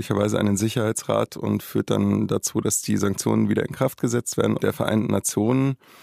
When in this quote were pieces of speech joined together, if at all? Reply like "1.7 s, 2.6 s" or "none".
4.6 s